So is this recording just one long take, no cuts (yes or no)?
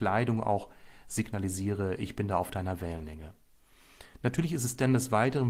yes